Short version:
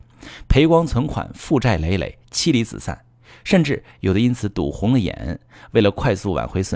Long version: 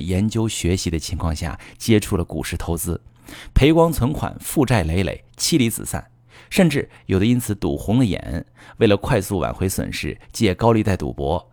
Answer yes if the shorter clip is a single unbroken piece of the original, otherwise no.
yes